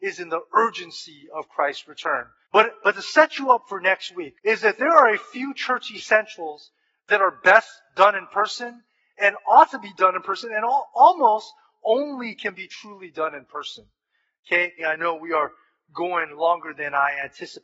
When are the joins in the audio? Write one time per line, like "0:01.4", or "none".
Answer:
0:02.4
0:04.3
0:14.8

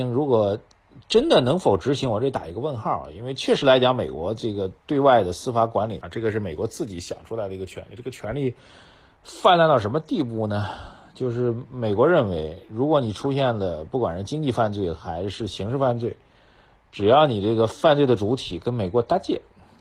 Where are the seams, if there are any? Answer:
0:06.0

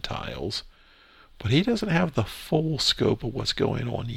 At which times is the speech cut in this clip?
none

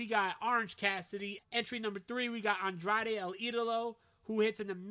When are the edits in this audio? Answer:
0:01.4

